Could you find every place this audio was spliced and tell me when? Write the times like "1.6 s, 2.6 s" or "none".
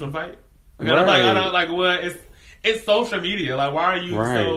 none